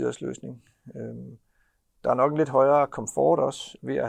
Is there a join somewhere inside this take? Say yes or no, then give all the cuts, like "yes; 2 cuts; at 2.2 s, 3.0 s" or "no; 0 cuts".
no; 0 cuts